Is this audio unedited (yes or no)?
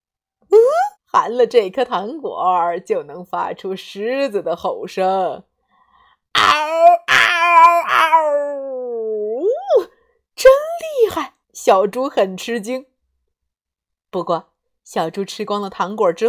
no